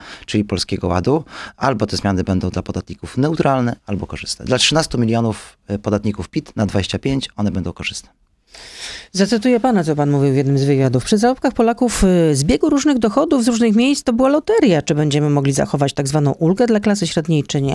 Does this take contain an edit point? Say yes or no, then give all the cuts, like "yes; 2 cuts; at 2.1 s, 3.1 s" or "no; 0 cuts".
no; 0 cuts